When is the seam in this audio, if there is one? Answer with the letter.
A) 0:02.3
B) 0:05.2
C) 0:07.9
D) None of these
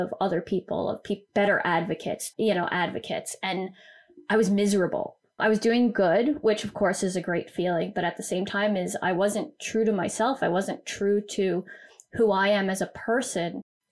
A